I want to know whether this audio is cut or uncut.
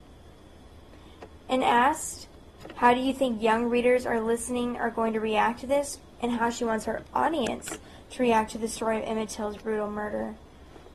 uncut